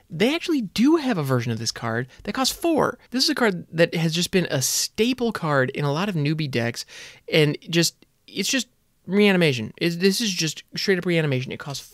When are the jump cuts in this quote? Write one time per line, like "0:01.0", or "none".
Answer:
0:03.1